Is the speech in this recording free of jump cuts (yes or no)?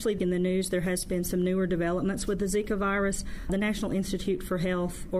yes